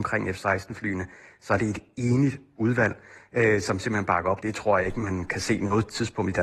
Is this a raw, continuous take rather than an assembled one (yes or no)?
no